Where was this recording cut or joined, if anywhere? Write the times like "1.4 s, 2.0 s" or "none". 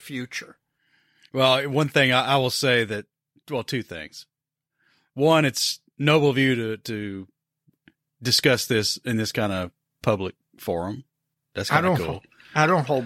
none